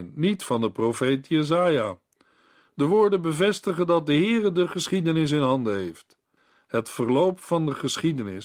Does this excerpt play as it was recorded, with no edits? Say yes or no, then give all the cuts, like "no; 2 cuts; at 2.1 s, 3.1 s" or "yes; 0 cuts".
yes; 0 cuts